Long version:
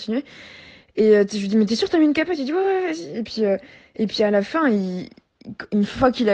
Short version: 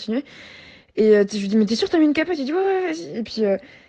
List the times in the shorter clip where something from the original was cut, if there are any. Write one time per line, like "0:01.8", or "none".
none